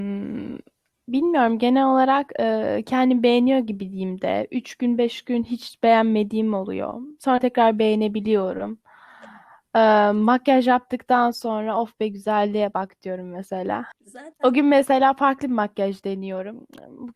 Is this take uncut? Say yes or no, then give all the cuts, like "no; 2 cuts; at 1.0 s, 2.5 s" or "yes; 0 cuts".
no; 1 cut; at 13.9 s